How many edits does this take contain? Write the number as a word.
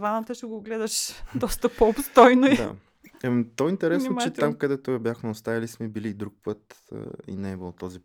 zero